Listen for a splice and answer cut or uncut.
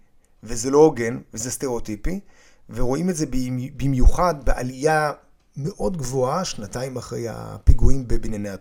uncut